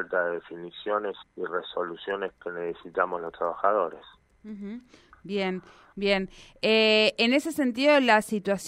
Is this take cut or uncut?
cut